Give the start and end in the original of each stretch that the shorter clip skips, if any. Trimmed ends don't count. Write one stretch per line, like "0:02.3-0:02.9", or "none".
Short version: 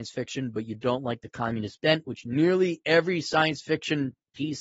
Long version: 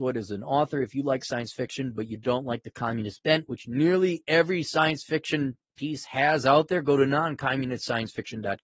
none